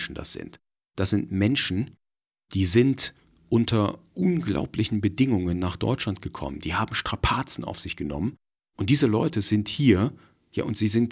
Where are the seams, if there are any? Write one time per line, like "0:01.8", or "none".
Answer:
0:08.6